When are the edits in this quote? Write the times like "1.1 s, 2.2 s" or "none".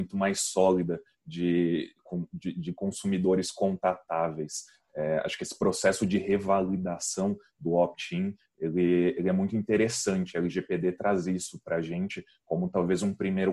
none